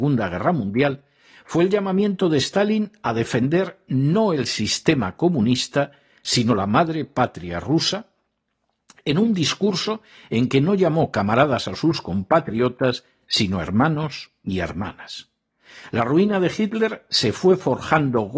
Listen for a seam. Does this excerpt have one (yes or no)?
no